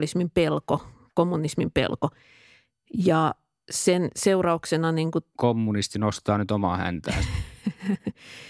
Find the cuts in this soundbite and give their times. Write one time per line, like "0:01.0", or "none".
none